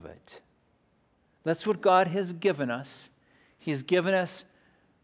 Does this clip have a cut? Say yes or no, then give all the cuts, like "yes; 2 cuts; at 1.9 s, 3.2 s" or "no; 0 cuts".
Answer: no; 0 cuts